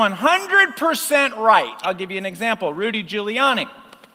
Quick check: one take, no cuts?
no; 1 cut; at 1.8 s

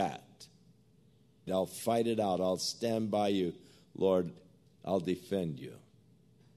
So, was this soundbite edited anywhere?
yes; 1 cut; at 1.5 s

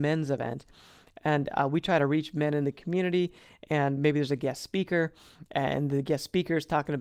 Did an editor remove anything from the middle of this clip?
no; 0 cuts

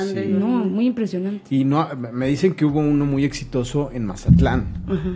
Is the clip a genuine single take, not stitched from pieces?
yes; 0 cuts

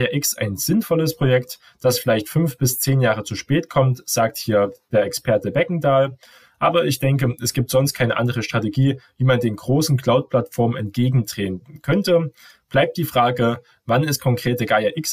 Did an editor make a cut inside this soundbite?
no; 0 cuts

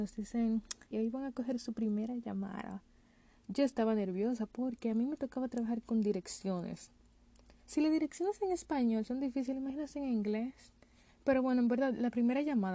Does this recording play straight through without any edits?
no; 1 cut; at 0.9 s

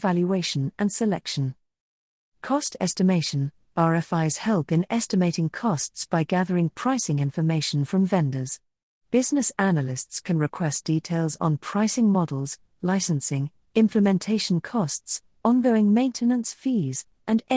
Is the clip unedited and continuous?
no; 1 cut; at 2.2 s

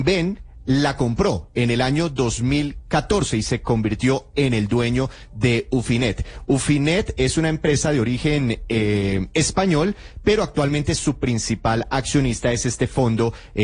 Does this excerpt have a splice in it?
no; 0 cuts

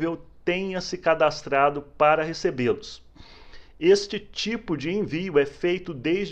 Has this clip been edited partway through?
no; 0 cuts

